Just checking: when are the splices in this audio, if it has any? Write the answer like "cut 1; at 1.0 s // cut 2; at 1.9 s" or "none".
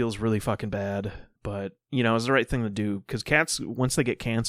cut 1; at 1.4 s